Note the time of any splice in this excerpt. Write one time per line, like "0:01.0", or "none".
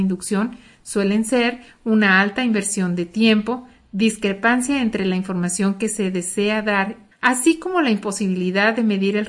0:07.1